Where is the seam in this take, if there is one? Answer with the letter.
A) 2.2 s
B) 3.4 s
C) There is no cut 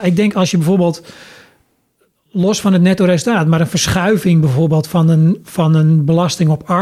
C